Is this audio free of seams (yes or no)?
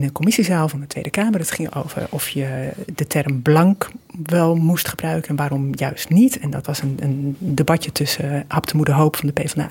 yes